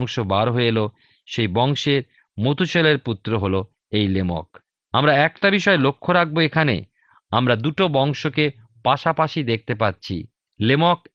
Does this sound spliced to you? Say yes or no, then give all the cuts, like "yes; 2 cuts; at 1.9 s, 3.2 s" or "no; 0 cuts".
no; 0 cuts